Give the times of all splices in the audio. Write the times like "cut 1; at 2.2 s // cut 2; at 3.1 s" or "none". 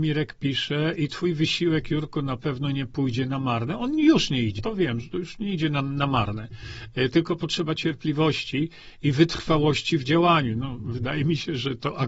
cut 1; at 4.6 s